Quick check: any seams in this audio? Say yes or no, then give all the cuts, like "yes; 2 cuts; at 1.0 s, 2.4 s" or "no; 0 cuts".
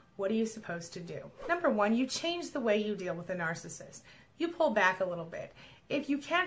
no; 0 cuts